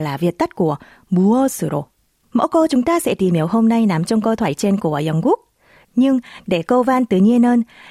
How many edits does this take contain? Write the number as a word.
two